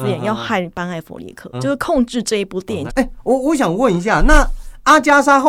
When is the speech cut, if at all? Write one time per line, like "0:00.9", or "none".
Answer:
0:01.5
0:02.9